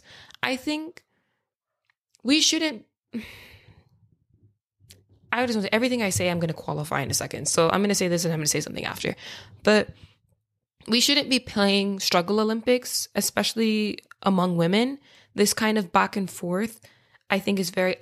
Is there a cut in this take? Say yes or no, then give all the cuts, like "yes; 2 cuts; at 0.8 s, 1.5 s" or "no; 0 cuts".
no; 0 cuts